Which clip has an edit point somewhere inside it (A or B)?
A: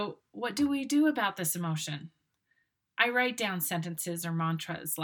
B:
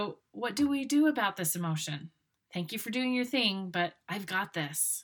B